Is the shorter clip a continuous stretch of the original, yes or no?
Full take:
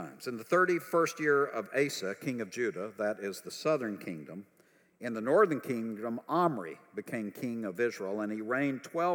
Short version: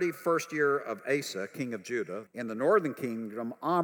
no